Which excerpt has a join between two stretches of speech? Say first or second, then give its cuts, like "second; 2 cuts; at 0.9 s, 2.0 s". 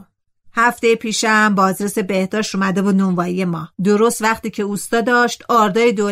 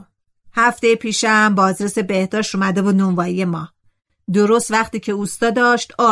first; 1 cut; at 3.7 s